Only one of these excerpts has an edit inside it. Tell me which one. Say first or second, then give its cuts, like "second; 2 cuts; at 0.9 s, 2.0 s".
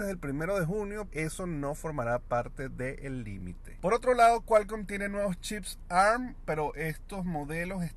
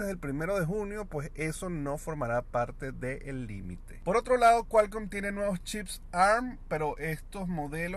first; 1 cut; at 1.1 s